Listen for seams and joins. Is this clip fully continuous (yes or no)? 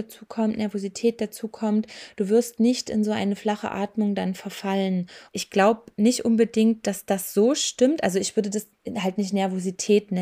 no